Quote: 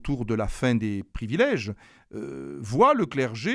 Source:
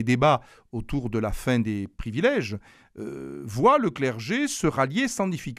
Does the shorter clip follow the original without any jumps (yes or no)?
yes